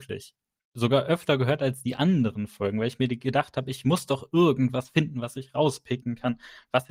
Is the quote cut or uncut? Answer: uncut